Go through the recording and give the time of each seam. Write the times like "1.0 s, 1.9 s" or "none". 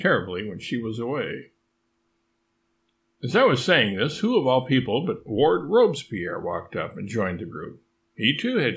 none

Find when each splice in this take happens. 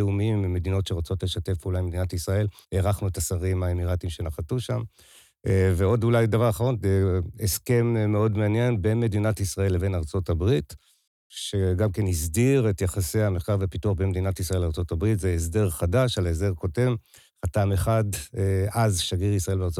2.6 s

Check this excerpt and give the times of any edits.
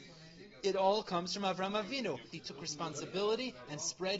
2.3 s

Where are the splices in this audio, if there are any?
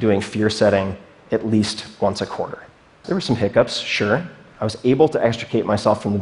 3.0 s

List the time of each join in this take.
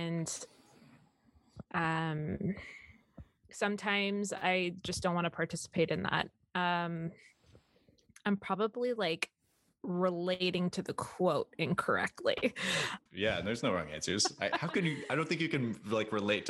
13.1 s

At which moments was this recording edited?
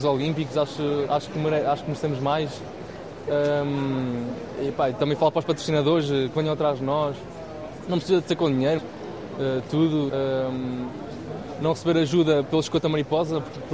8.8 s, 10.1 s

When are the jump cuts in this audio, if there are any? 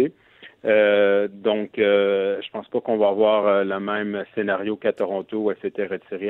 none

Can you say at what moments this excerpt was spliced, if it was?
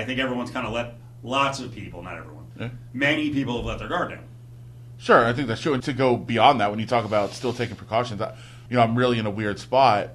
5.8 s, 8.7 s

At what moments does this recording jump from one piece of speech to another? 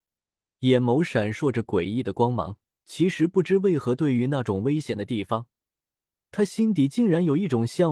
2.7 s

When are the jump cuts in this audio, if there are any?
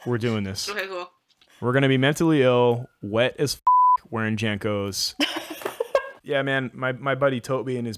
none

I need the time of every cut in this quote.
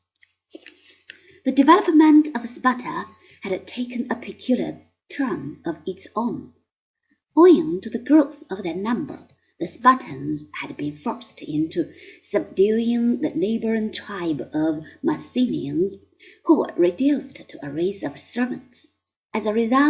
none

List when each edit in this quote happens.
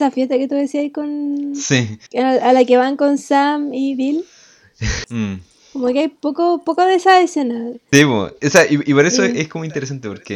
2.1 s, 5.0 s, 7.9 s

